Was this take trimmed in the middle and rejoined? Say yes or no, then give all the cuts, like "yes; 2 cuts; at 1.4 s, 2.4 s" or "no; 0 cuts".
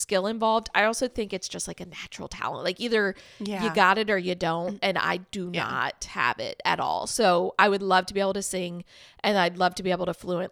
no; 0 cuts